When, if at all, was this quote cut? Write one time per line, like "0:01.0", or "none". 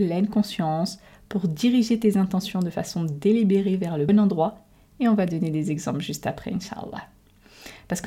0:04.1